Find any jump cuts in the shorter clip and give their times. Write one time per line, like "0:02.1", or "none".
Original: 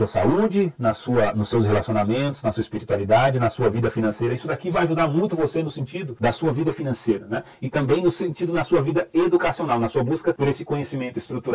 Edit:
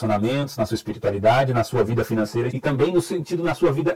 0:02.5